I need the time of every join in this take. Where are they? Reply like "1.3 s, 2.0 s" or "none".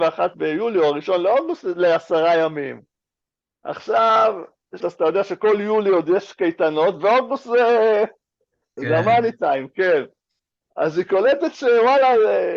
4.8 s, 8.8 s